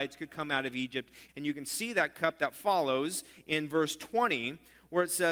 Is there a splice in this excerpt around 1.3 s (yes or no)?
yes